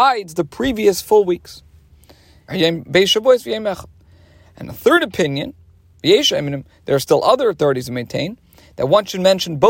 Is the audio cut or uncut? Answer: cut